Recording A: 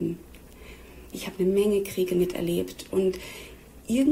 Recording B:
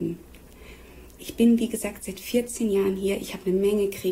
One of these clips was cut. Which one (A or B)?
A